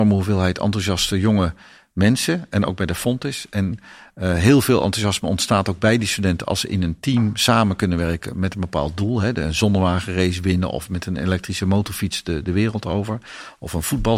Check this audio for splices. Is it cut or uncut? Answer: uncut